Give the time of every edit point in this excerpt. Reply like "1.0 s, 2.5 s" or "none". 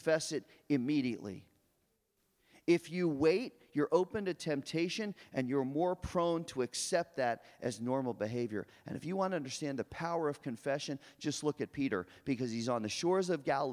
none